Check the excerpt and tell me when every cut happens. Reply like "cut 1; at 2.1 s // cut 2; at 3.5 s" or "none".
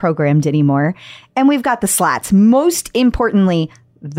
none